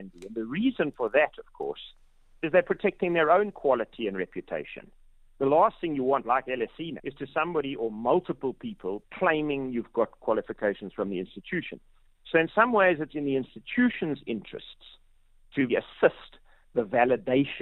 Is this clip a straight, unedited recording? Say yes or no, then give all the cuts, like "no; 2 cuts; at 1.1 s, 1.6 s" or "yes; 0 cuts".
no; 3 cuts; at 7.0 s, 9.0 s, 15.7 s